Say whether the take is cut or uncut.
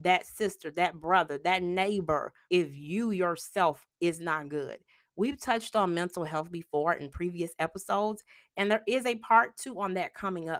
cut